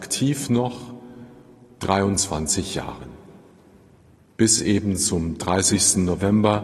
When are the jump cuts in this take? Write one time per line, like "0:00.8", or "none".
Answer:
none